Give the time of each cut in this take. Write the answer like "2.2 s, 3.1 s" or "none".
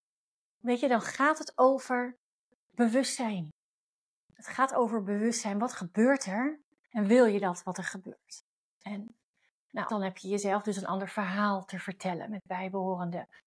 9.9 s